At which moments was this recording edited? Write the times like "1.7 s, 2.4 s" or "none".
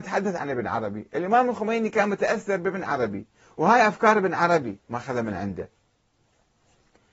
4.8 s